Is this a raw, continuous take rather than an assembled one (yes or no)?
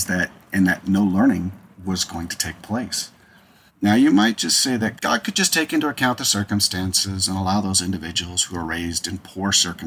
no